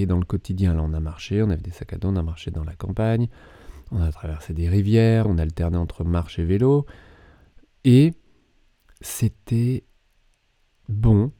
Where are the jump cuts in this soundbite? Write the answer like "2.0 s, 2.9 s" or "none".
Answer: 5.2 s